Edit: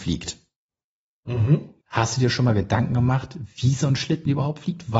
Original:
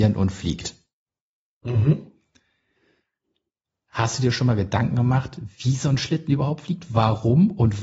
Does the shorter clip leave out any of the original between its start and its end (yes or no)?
yes